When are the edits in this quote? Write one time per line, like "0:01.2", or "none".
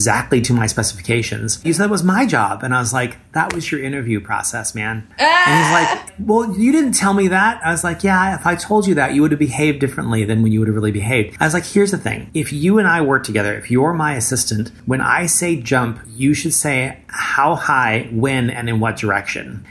0:01.6